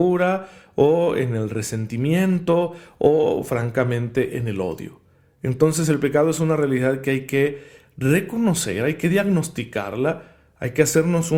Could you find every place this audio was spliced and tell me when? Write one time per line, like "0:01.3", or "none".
none